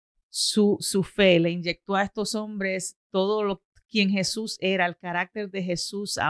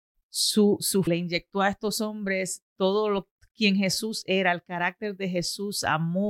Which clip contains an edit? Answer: second; 1 cut; at 1.1 s

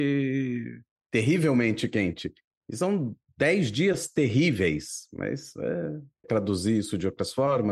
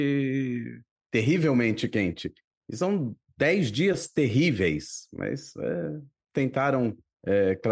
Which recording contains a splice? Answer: first; 1 cut; at 6.2 s

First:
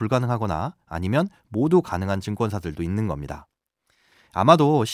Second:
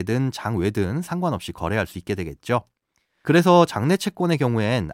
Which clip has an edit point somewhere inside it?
second; 1 cut; at 3.2 s

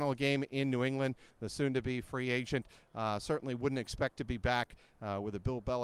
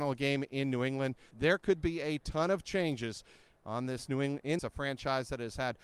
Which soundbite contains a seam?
second; 2 cuts; at 1.3 s, 4.6 s

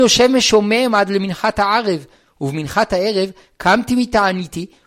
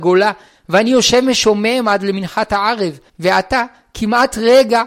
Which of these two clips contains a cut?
second; 1 cut; at 3.1 s

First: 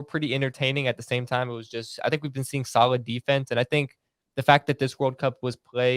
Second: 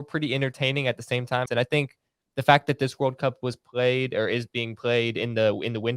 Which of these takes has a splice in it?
second; 1 cut; at 1.5 s

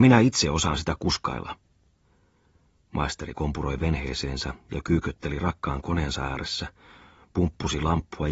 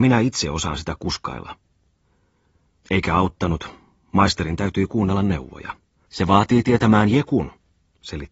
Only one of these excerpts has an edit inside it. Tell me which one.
second; 2 cuts; at 2.8 s, 6.1 s

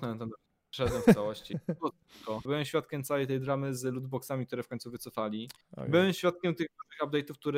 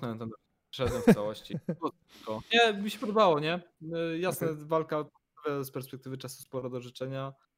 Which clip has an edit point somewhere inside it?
first; 1 cut; at 2.5 s

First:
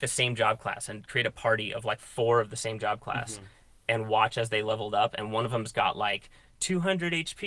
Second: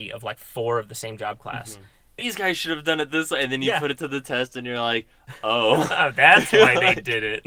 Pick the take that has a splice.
second; 1 cut; at 2.2 s

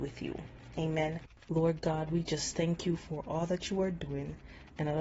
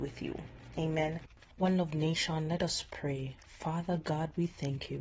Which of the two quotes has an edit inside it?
first; 1 cut; at 1.5 s

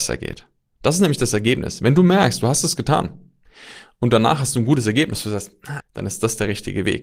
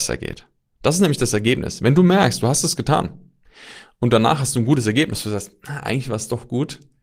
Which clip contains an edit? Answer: first; 1 cut; at 5.8 s

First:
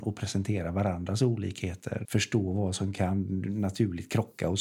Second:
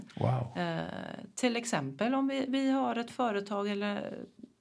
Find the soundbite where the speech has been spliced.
first; 1 cut; at 2.0 s

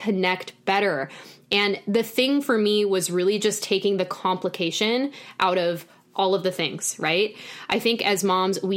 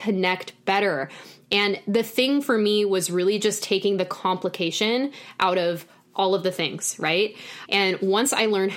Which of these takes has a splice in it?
second; 1 cut; at 7.7 s

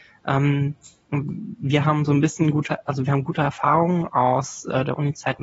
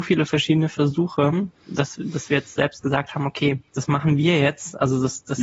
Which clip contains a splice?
second; 1 cut; at 3.7 s

